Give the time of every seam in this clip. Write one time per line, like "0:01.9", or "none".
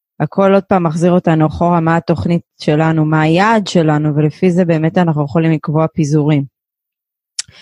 none